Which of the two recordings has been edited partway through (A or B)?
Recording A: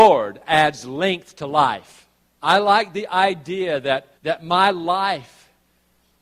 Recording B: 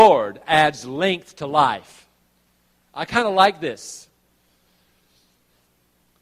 A